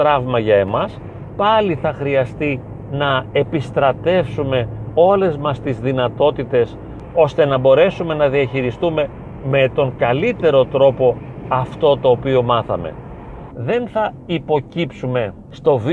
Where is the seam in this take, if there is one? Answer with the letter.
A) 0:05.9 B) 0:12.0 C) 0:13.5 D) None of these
C